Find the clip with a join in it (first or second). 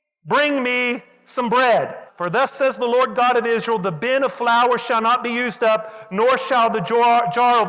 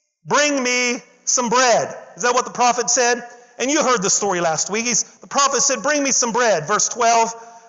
first